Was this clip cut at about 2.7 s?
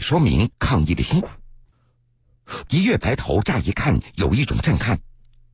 yes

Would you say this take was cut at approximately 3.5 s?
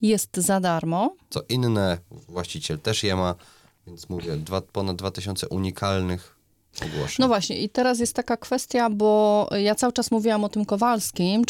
no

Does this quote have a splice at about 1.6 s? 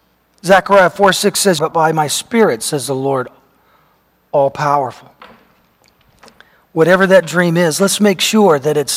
yes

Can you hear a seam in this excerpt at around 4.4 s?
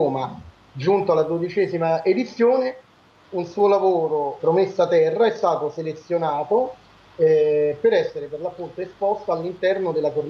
yes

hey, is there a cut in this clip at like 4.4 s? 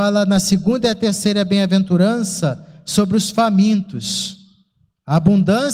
no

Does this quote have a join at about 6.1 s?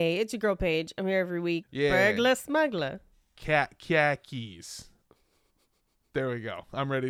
no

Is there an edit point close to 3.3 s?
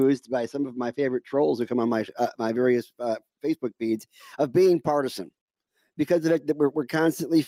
no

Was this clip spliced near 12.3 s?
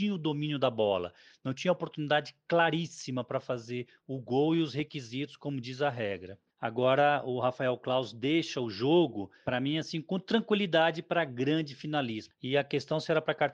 yes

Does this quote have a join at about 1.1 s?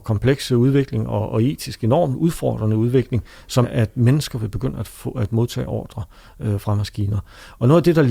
no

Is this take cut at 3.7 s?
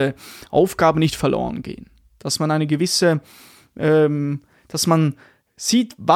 no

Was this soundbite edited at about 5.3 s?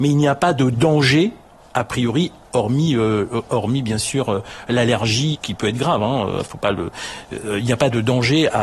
yes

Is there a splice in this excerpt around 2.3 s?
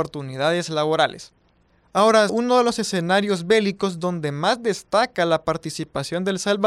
yes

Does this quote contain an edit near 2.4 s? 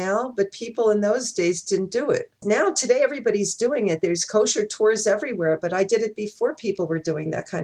yes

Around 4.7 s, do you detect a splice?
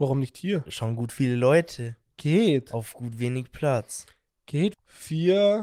yes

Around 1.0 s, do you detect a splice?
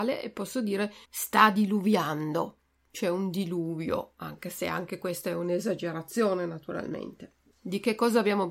yes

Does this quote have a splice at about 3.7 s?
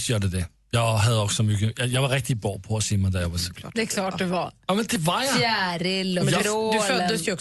no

